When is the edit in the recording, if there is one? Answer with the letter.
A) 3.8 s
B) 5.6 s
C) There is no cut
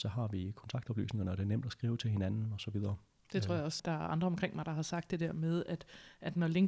A